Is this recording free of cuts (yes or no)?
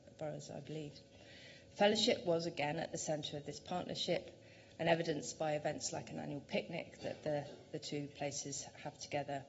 no